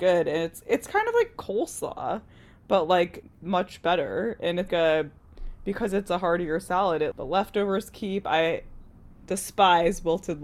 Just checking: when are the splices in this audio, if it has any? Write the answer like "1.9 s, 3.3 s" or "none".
3.2 s, 4.7 s, 7.1 s